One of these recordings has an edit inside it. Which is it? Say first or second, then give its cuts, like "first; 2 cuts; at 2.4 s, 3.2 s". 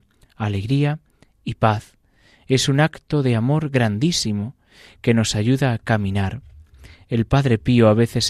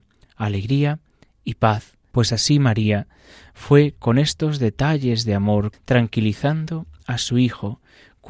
second; 2 cuts; at 2.1 s, 5.7 s